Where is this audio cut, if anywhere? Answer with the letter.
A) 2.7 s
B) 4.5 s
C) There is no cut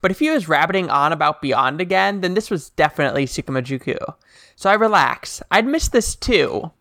C